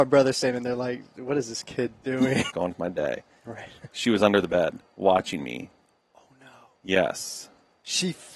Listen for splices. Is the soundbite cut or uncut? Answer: cut